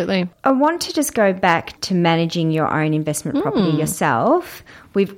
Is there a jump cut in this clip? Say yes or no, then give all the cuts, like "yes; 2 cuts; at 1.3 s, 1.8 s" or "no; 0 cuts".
no; 0 cuts